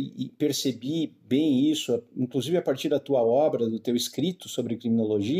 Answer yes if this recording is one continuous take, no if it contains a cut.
yes